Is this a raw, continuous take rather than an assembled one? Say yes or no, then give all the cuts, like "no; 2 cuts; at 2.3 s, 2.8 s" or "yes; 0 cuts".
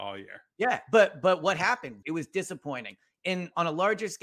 no; 1 cut; at 2.0 s